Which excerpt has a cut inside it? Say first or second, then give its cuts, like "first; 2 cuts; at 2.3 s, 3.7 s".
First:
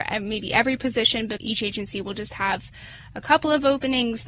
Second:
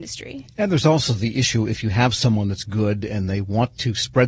first; 1 cut; at 1.4 s